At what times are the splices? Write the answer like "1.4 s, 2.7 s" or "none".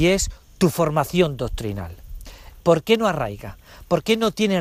2.6 s